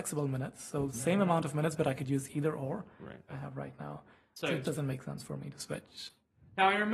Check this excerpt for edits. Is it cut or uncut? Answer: cut